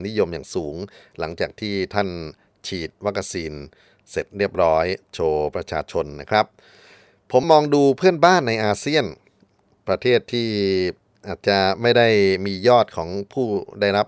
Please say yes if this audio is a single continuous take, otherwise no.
no